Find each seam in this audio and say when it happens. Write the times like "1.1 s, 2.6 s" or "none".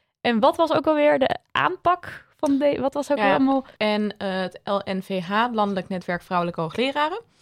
3.8 s